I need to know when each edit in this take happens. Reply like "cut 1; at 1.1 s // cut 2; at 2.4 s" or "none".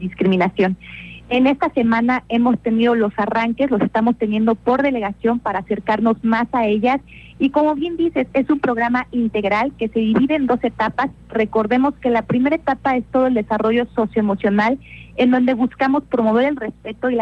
cut 1; at 1.2 s